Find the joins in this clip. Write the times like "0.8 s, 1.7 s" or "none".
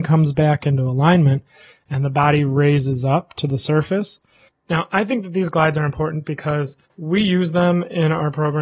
1.7 s, 4.5 s, 6.9 s